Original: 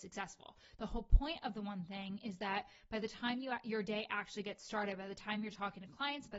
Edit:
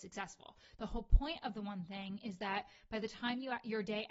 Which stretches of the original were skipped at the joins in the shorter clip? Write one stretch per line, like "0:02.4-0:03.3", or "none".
none